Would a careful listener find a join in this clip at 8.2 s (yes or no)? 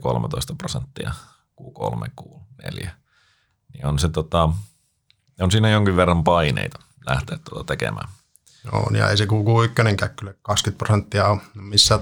no